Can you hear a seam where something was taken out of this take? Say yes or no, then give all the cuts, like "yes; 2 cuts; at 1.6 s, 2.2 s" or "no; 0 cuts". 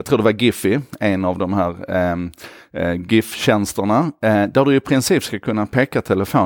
no; 0 cuts